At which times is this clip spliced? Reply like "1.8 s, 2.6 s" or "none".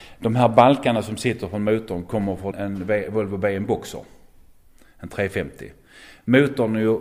2.5 s